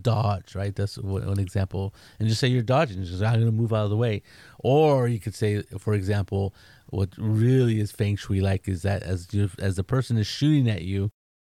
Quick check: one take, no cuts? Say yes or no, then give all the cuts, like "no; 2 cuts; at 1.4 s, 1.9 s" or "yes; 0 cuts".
yes; 0 cuts